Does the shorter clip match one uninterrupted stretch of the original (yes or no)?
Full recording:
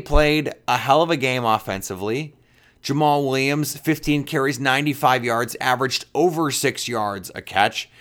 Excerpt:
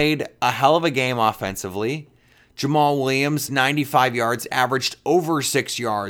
no